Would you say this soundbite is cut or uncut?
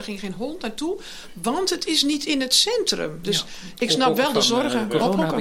cut